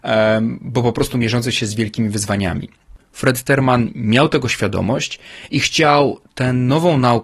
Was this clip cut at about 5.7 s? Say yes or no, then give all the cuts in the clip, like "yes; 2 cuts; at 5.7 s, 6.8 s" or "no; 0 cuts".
no; 1 cut; at 3.0 s